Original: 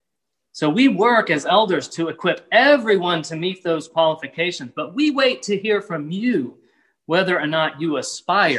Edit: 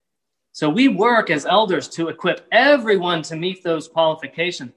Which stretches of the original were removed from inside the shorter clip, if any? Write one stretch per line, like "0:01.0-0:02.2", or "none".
none